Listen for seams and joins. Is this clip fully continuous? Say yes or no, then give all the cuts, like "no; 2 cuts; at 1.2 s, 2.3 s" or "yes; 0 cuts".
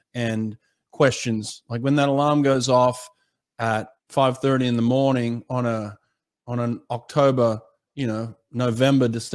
no; 1 cut; at 4.0 s